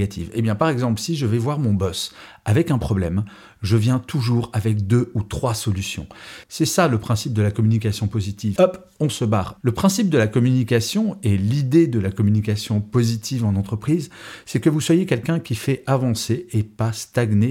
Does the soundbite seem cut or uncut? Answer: cut